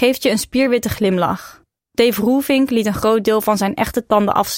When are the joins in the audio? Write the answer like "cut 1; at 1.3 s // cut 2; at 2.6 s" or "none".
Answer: cut 1; at 1.8 s